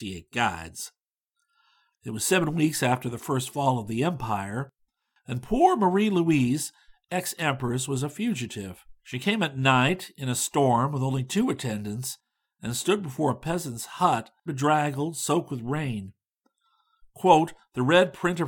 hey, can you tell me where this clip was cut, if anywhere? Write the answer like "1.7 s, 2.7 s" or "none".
1.9 s, 9.0 s, 14.5 s